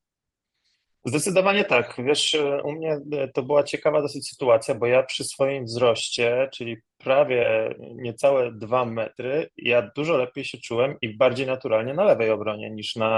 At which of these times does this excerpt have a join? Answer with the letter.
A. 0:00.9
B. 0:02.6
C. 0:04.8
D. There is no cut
D